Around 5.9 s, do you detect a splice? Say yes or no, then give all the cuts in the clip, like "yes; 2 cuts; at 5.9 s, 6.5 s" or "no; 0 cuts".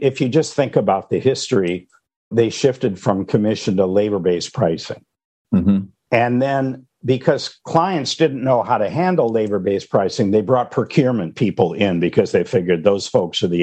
no; 0 cuts